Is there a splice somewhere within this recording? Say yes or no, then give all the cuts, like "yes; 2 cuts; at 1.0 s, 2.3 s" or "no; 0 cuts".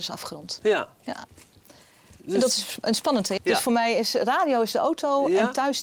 yes; 1 cut; at 3.4 s